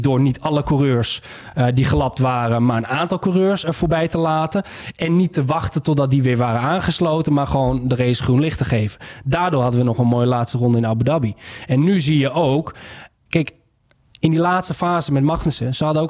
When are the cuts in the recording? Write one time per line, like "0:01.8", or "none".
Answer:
none